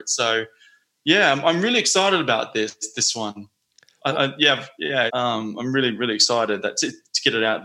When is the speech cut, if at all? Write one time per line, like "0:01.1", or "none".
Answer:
0:05.1